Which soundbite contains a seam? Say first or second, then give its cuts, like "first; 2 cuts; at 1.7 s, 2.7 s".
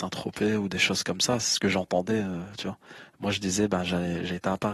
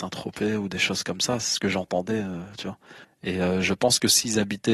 second; 1 cut; at 3.0 s